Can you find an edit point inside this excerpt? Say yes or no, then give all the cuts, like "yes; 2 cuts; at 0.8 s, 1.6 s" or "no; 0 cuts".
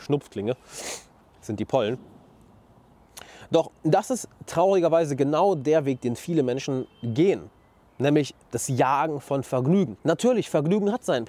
no; 0 cuts